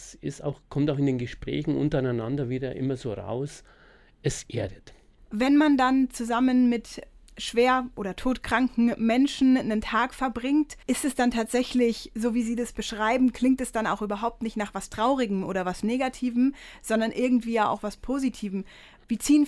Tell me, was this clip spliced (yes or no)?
yes